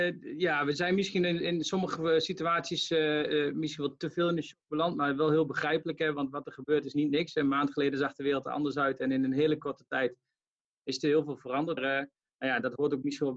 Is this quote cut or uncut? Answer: cut